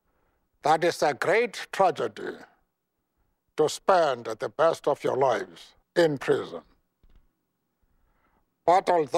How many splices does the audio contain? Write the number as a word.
one